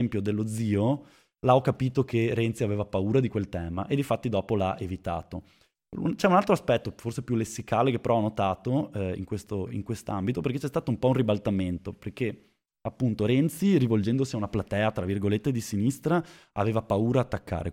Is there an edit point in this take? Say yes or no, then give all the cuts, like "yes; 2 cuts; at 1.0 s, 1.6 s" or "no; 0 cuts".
no; 0 cuts